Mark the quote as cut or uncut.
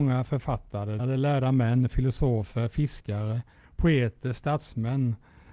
cut